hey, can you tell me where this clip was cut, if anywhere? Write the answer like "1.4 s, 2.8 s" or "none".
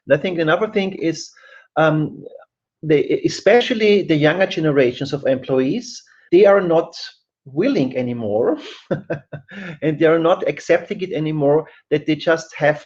2.8 s, 6.3 s

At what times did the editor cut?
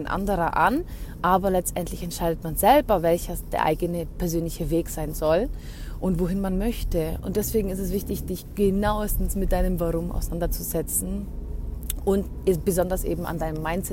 7.2 s

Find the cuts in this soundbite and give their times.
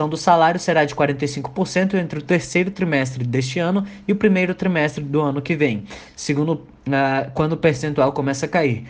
none

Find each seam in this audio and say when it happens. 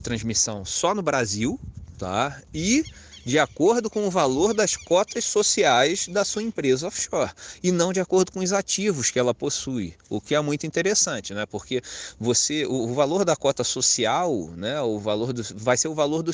none

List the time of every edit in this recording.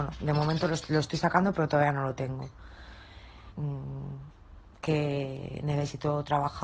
3.5 s

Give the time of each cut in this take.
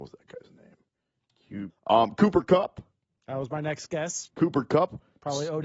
1.7 s

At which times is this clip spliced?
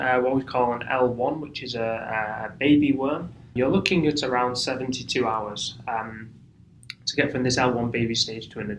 3.6 s

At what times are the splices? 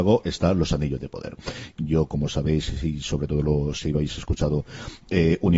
1.8 s

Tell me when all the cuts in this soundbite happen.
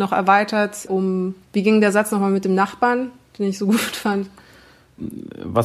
1.4 s

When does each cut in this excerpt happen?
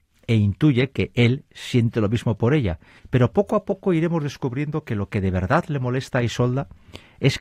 3.0 s

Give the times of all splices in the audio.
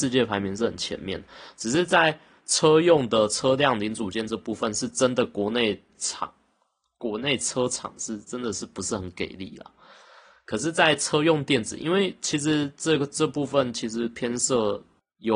none

